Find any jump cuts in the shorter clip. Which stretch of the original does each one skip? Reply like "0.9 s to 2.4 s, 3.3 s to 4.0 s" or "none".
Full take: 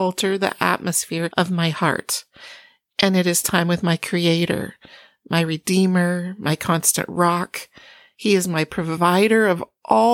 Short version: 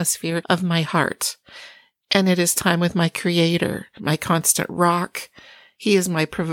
4.8 s to 6.4 s